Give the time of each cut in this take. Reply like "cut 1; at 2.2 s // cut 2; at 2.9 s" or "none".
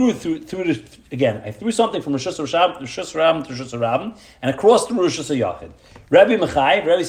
none